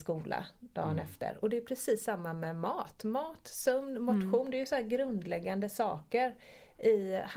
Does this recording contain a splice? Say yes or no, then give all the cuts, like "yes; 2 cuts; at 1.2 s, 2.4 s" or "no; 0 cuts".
no; 0 cuts